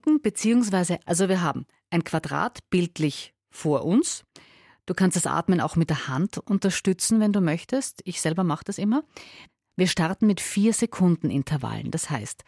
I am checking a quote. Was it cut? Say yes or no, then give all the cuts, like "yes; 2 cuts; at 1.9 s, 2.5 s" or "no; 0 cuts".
yes; 1 cut; at 1.0 s